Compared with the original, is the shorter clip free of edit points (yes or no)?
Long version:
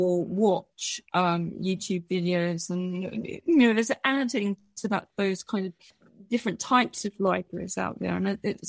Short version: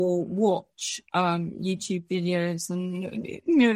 yes